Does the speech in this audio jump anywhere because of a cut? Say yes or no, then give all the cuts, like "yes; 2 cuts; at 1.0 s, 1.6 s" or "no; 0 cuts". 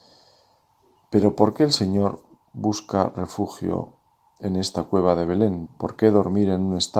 yes; 1 cut; at 5.7 s